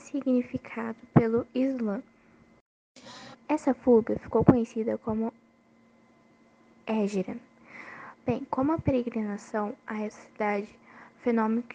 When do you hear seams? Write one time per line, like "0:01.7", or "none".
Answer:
0:03.3
0:08.1